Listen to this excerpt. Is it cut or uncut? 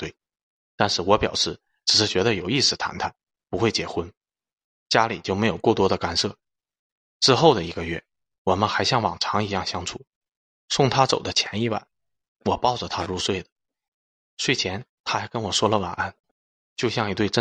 cut